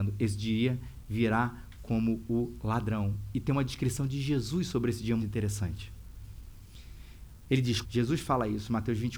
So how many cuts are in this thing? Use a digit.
2